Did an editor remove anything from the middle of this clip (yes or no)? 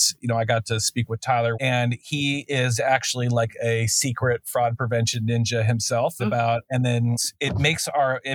yes